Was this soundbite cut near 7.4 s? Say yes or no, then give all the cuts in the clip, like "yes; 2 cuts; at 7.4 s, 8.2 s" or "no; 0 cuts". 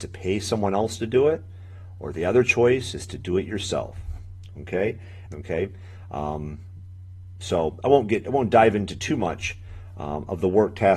no; 1 cut; at 5.3 s